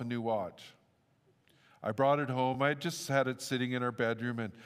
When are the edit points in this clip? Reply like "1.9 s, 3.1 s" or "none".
none